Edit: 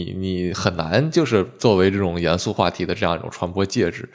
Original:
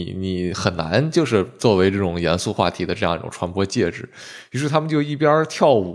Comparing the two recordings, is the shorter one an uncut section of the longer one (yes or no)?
yes